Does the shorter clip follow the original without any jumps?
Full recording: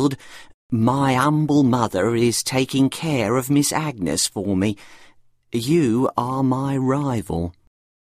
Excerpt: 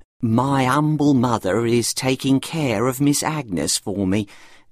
yes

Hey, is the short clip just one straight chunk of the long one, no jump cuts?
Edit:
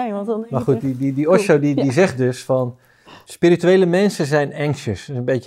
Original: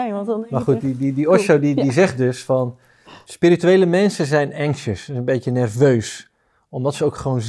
yes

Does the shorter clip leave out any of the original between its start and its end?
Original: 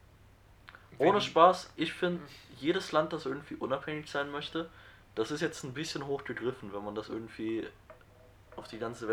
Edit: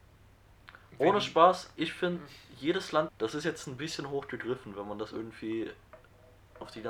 yes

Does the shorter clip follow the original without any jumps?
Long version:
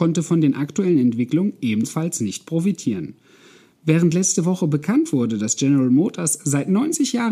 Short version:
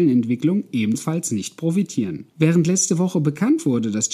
no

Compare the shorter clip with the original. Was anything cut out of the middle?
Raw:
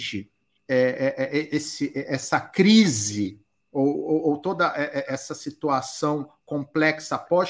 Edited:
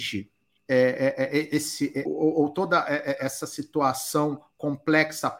yes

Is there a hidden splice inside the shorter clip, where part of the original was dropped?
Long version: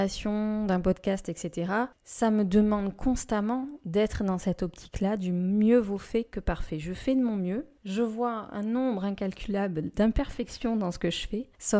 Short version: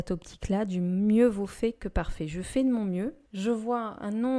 no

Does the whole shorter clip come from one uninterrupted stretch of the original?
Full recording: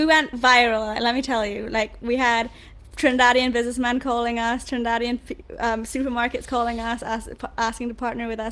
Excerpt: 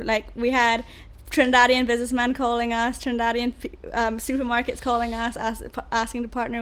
yes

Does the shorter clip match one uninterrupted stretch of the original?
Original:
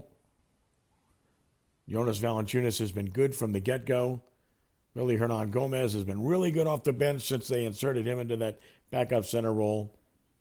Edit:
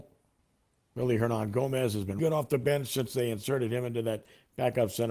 no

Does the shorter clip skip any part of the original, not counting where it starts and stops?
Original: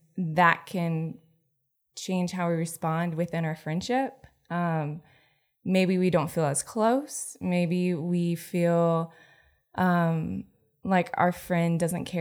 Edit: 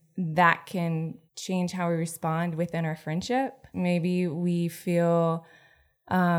yes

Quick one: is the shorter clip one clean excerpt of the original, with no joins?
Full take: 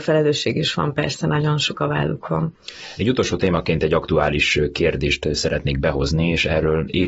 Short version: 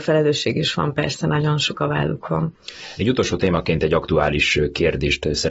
yes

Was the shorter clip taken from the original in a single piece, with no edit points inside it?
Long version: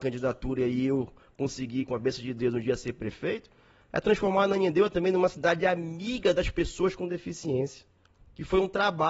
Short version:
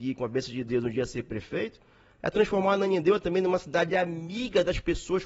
yes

